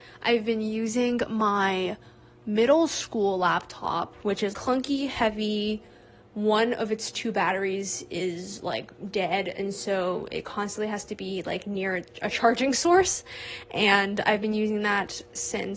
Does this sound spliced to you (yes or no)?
yes